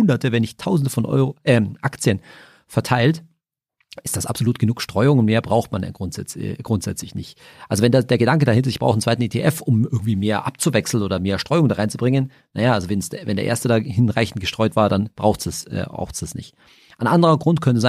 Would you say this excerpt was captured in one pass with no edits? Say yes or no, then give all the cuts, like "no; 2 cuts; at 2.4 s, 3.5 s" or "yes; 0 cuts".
yes; 0 cuts